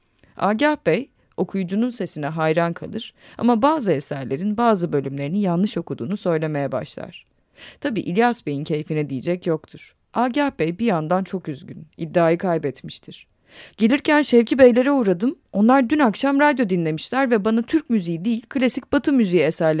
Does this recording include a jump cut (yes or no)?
yes